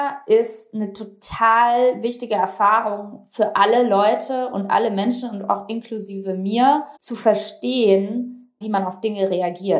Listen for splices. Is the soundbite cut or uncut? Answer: cut